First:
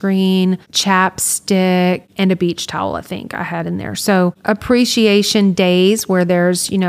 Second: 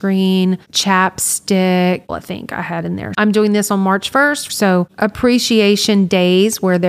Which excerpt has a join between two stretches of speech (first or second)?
second